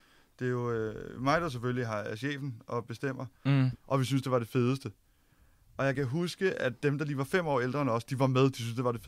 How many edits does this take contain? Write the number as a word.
one